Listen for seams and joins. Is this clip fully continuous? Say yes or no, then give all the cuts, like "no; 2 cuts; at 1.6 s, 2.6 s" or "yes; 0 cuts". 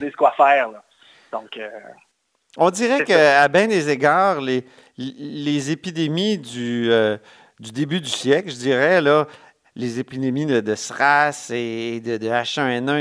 yes; 0 cuts